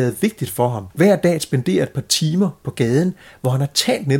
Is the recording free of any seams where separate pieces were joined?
no; 1 cut; at 0.9 s

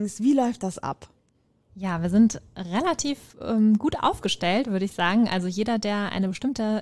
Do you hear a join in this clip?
no; 0 cuts

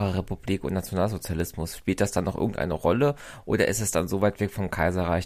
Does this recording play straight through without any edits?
yes; 0 cuts

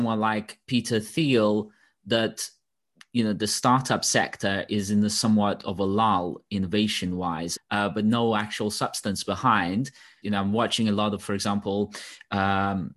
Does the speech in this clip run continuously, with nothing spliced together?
no; 2 cuts; at 7.6 s, 10.2 s

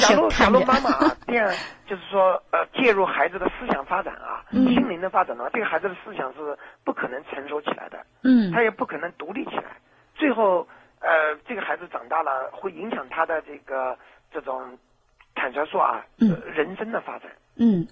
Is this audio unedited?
yes; 0 cuts

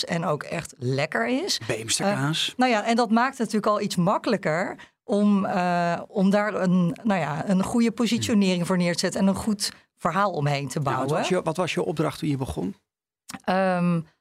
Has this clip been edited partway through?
no; 0 cuts

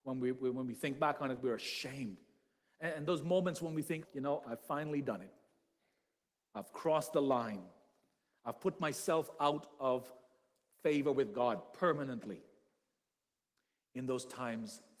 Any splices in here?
yes; 1 cut; at 4.0 s

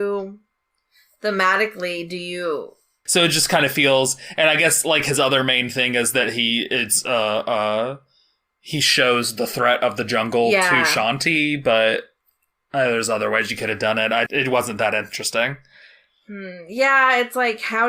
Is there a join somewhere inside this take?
yes; 2 cuts; at 3.1 s, 14.3 s

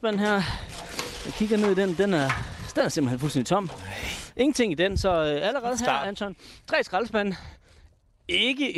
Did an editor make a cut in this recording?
no; 0 cuts

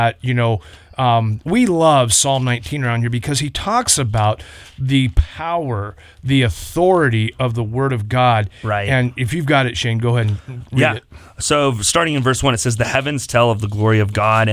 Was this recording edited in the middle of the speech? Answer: yes; 1 cut; at 1.4 s

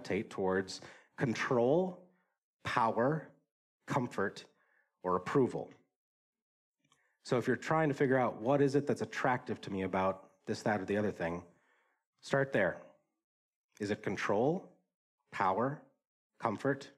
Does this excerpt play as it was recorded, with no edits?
yes; 0 cuts

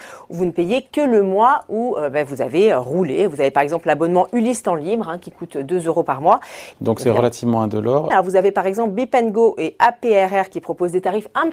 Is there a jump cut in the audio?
yes; 2 cuts; at 6.7 s, 8.1 s

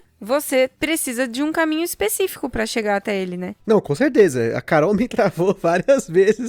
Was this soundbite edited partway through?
no; 0 cuts

